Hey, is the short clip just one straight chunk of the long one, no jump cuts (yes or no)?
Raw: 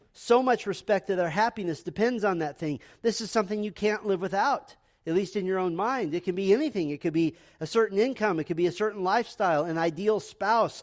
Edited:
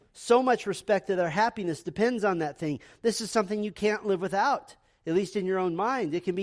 yes